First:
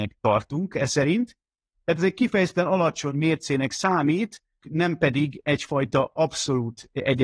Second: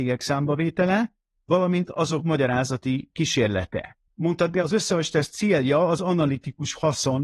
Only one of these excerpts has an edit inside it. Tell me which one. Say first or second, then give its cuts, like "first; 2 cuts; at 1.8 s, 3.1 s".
first; 1 cut; at 4.6 s